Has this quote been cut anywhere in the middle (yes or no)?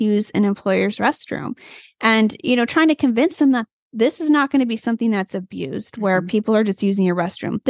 no